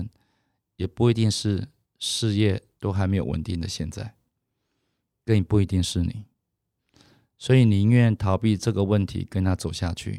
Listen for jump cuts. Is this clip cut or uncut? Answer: uncut